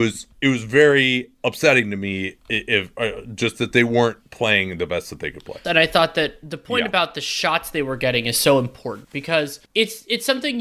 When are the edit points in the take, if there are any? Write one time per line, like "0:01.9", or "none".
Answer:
0:05.6